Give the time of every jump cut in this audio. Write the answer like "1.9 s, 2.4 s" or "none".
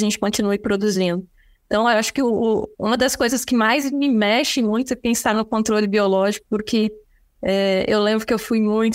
none